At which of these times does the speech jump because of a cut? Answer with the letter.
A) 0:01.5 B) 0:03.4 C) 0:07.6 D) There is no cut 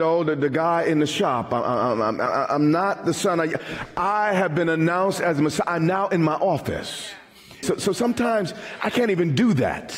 C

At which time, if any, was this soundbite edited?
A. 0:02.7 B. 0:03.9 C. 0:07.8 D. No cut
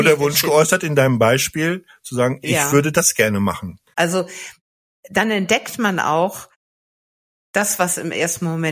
B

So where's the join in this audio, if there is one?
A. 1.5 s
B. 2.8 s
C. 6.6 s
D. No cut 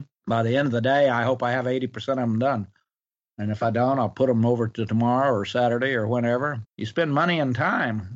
C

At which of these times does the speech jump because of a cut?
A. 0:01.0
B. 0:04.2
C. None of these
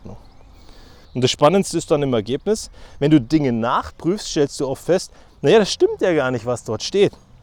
A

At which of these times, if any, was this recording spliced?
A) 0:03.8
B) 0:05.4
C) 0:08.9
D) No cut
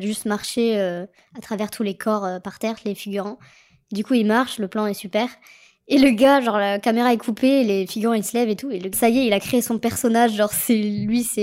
C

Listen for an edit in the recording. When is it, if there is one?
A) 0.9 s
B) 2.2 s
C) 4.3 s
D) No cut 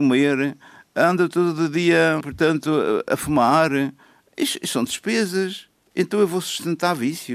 B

